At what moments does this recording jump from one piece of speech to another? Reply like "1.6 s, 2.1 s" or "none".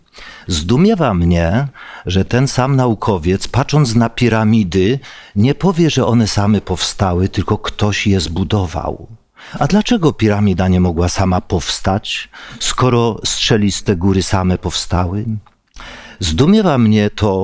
none